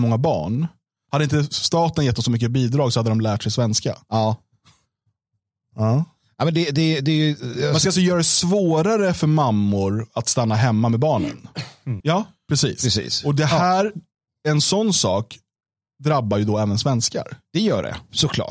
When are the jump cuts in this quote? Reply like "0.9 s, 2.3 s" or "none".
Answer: 12.0 s